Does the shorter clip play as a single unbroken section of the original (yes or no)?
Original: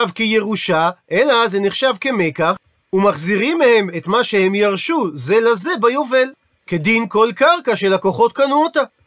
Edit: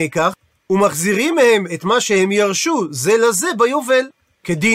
yes